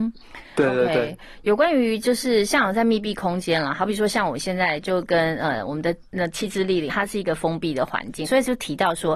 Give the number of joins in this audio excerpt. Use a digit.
2